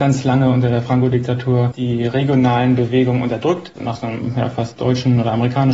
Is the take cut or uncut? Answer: cut